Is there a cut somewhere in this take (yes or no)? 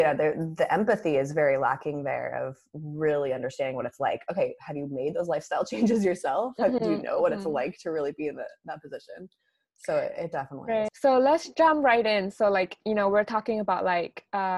yes